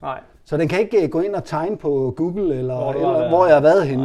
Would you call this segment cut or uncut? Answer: uncut